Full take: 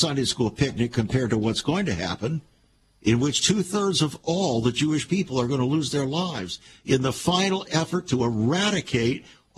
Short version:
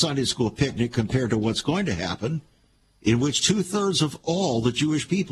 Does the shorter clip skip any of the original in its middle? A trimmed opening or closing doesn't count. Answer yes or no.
no